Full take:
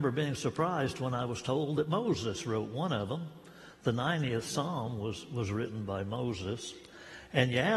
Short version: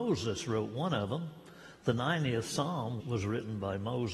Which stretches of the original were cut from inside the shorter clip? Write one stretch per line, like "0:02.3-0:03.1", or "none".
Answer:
0:05.0-0:05.3